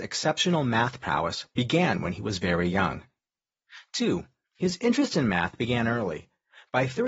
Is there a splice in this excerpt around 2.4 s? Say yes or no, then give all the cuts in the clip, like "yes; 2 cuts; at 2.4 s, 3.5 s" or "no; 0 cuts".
no; 1 cut; at 4.4 s